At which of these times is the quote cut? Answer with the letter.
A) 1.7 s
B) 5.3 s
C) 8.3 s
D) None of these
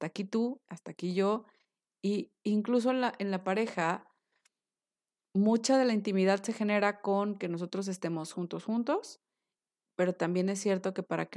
C